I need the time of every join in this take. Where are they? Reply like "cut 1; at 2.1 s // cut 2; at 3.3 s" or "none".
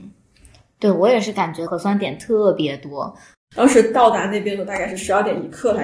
cut 1; at 1.7 s // cut 2; at 3.3 s